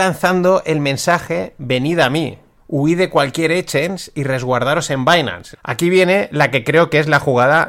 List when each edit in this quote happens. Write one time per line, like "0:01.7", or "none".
0:02.6
0:05.5